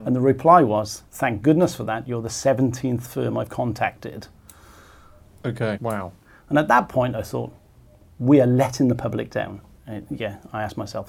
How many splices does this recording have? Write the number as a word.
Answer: two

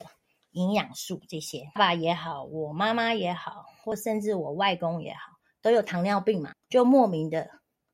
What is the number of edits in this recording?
two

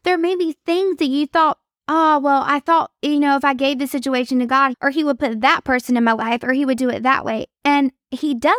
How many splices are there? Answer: one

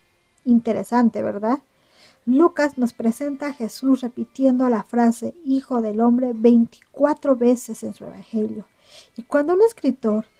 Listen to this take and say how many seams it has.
zero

